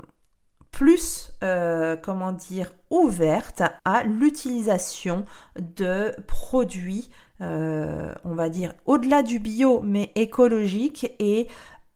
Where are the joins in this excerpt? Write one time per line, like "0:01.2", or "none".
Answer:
0:03.8